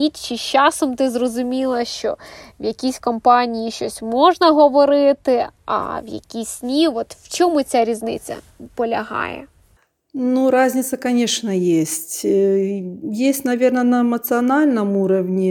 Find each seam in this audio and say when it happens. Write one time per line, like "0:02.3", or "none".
none